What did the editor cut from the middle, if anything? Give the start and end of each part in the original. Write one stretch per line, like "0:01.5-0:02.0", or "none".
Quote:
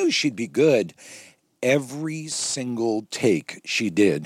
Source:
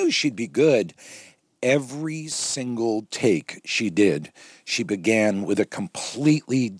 none